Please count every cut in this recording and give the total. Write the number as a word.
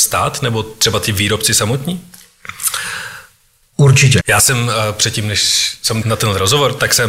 two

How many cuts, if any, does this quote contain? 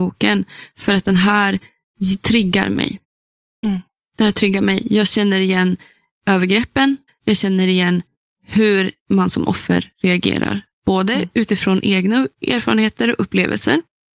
one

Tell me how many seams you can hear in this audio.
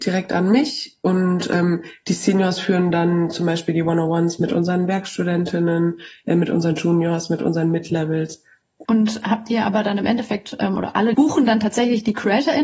two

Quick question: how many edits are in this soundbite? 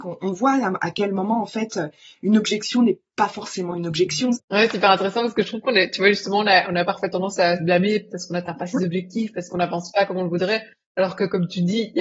one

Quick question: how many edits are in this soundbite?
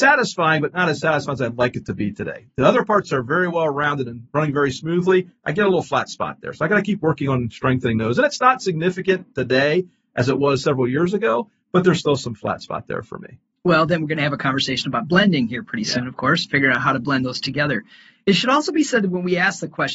zero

